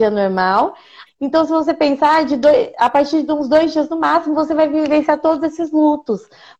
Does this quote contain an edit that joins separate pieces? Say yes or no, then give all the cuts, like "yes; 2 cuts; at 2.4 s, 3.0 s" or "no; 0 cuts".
yes; 1 cut; at 1.1 s